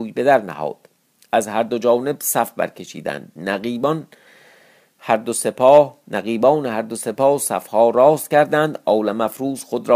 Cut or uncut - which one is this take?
uncut